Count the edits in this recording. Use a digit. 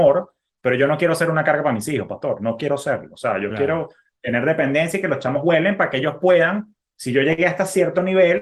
0